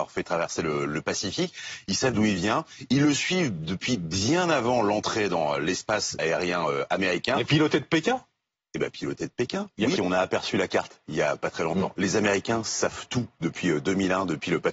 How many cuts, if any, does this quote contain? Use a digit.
2